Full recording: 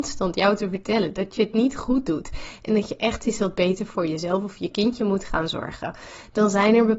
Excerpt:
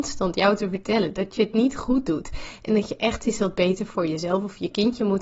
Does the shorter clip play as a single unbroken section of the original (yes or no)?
yes